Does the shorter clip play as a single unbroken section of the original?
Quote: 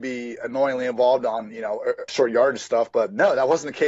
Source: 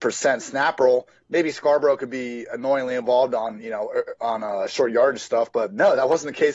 no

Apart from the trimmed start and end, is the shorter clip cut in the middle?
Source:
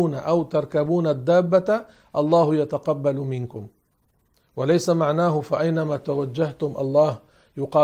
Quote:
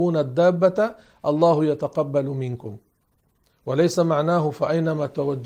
no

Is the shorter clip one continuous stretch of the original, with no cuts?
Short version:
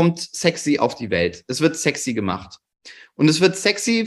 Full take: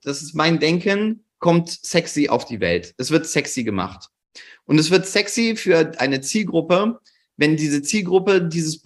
yes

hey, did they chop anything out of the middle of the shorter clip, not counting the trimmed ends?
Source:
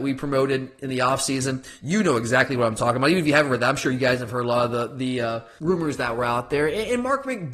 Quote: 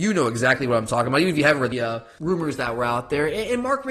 yes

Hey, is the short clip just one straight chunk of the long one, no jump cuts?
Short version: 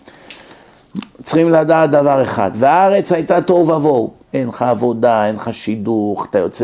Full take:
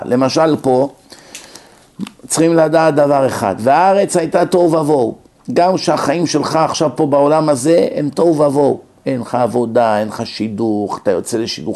no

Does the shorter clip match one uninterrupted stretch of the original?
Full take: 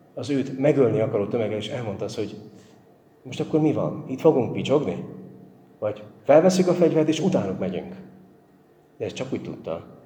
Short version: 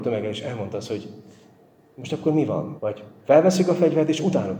no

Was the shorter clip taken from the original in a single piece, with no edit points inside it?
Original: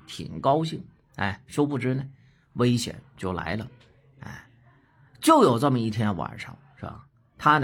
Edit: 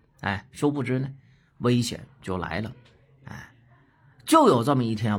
yes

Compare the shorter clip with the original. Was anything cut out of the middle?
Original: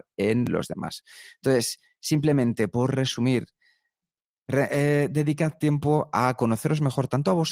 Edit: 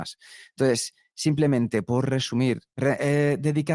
yes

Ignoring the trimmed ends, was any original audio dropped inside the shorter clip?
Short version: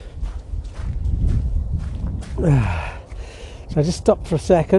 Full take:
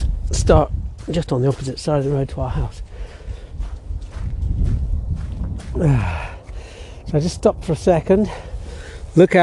no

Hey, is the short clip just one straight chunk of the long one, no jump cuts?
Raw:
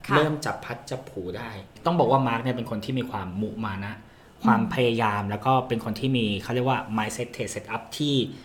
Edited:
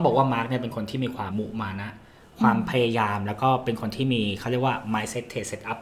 no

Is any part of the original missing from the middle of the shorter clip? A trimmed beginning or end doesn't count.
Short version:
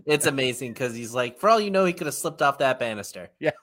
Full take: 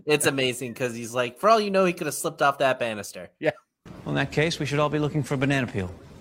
no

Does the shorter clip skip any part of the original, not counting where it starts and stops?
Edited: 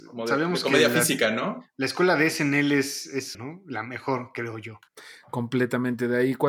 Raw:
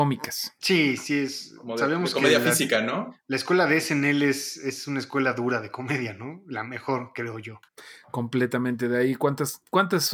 yes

